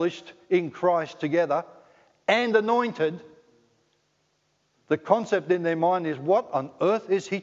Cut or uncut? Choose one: uncut